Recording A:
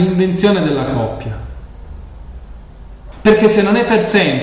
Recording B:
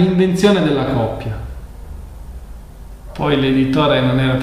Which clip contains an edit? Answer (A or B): A